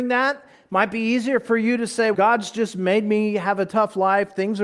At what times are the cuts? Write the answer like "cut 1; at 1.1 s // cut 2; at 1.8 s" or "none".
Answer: cut 1; at 2.1 s